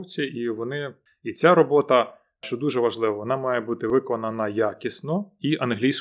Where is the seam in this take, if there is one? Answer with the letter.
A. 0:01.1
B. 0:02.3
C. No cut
A